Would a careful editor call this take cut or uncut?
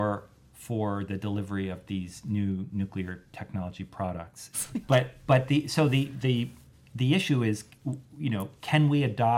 cut